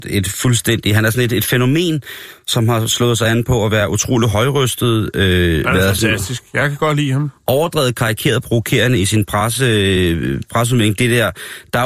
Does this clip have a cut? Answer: no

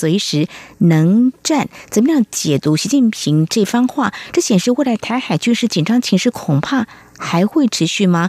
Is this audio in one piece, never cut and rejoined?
yes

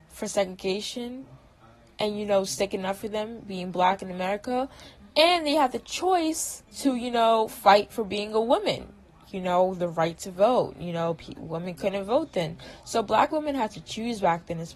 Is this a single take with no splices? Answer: no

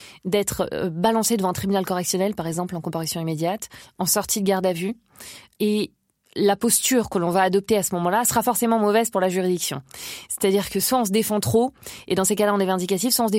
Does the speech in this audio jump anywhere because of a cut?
no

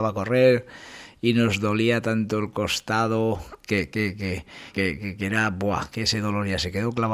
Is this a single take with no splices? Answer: no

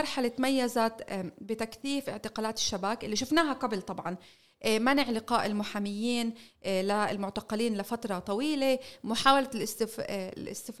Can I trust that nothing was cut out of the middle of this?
yes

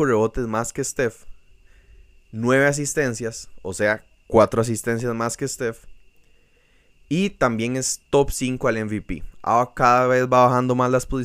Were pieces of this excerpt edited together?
no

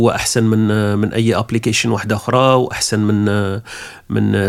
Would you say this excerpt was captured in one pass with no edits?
yes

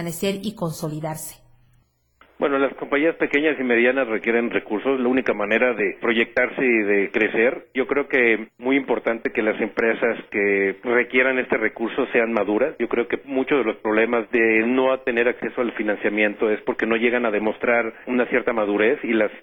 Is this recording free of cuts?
yes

